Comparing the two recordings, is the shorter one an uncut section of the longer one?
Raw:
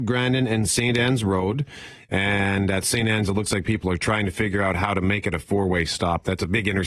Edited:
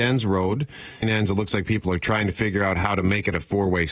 no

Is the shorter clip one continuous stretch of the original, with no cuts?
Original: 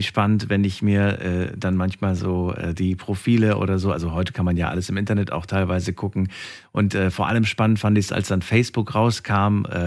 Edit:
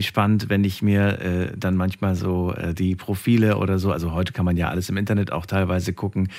yes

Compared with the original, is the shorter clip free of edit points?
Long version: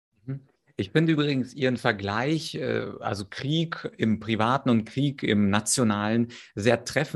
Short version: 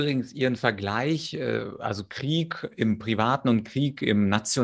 yes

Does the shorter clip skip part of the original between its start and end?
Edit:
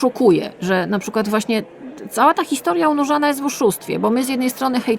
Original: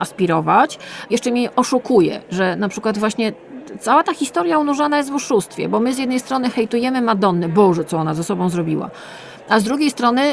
no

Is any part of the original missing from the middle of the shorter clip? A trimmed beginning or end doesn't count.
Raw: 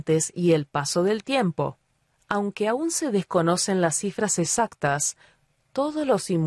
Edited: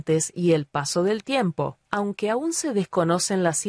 yes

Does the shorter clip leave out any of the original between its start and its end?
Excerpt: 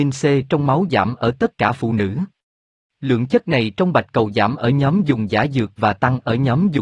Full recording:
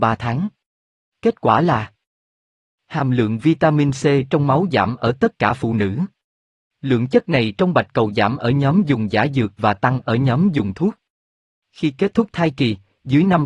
no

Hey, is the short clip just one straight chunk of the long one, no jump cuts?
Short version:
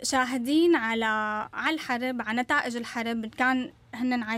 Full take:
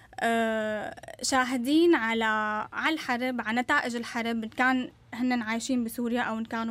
yes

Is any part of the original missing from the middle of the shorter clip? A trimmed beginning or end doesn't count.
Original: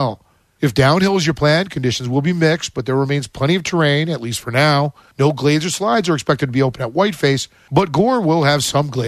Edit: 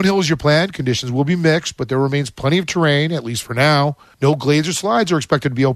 no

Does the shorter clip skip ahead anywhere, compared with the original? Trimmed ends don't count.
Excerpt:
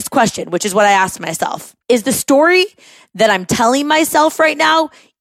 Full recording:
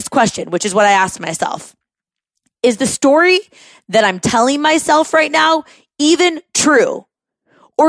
yes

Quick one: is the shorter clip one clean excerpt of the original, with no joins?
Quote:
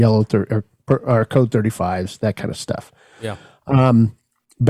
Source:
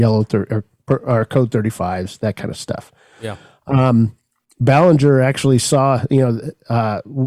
yes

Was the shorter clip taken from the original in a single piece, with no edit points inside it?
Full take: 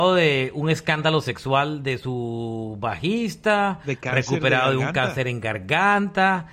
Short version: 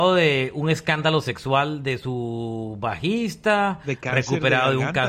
yes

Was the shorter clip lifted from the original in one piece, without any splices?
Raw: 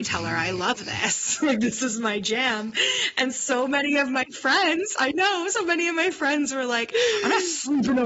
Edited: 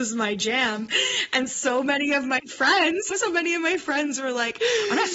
no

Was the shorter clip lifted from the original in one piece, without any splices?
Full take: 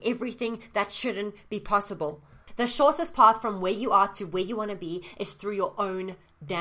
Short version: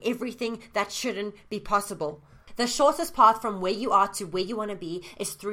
yes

